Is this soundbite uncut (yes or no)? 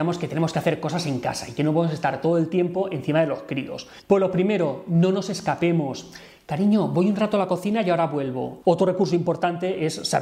no